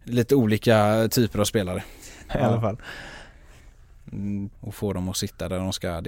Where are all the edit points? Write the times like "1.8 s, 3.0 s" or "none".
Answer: 2.3 s, 4.5 s